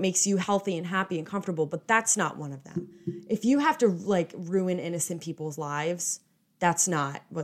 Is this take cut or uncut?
uncut